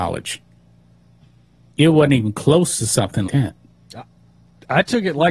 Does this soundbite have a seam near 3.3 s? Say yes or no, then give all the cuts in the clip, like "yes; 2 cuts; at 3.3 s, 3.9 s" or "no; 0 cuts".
yes; 1 cut; at 3.3 s